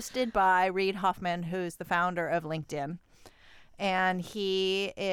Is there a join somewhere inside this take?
no; 0 cuts

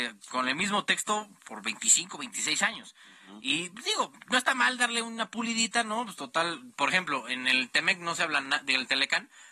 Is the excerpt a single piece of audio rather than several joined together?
yes; 0 cuts

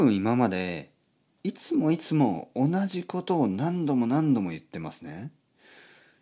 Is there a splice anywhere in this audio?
no; 0 cuts

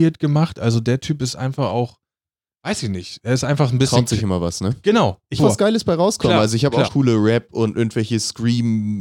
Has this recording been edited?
yes; 2 cuts; at 5.4 s, 6.9 s

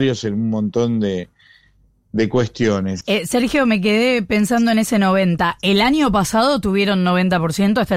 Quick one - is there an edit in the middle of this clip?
yes; 1 cut; at 3.0 s

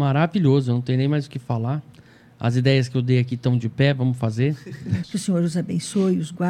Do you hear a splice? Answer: yes; 1 cut; at 5.0 s

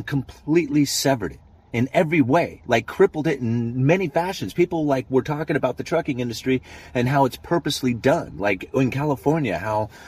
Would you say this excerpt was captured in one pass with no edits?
yes; 0 cuts

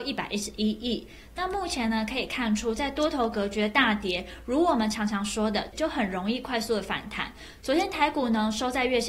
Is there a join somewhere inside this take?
yes; 1 cut; at 5.7 s

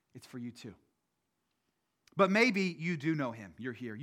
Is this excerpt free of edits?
yes; 0 cuts

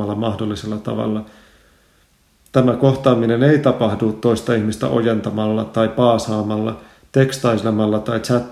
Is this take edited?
no; 0 cuts

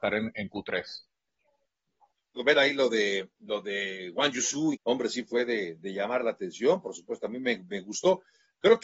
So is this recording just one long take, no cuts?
no; 2 cuts; at 2.4 s, 4.7 s

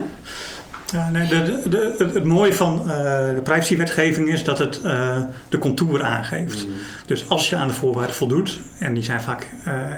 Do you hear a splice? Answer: no; 0 cuts

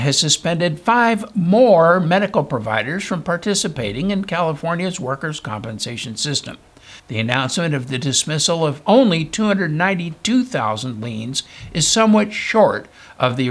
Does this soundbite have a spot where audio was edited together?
yes; 1 cut; at 7.0 s

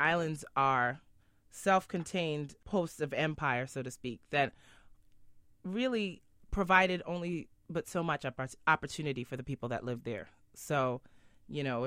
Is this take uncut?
yes; 0 cuts

